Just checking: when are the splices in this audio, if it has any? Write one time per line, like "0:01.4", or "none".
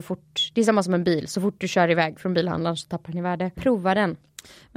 0:03.6